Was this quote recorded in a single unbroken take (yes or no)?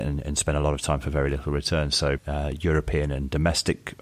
no